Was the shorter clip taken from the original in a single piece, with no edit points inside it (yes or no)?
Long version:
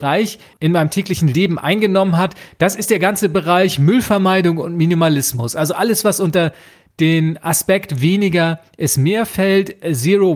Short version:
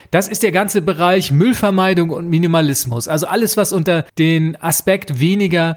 no